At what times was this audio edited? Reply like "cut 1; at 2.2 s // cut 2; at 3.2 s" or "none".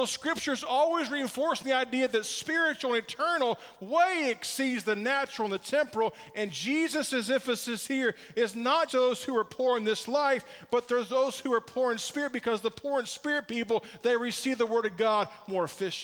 cut 1; at 8.9 s